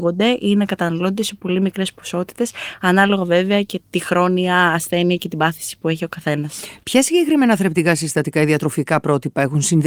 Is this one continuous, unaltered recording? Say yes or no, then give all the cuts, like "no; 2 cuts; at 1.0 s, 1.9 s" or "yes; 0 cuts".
yes; 0 cuts